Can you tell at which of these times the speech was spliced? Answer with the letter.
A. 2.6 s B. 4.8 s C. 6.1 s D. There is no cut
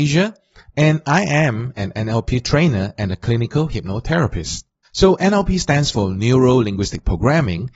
B